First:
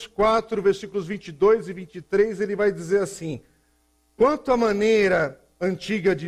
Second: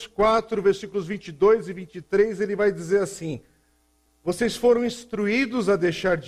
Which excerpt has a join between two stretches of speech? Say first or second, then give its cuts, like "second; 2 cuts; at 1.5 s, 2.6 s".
second; 1 cut; at 4.1 s